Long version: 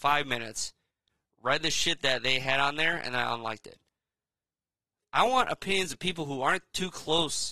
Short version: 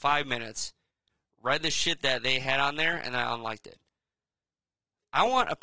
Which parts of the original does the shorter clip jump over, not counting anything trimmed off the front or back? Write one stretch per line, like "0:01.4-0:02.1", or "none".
none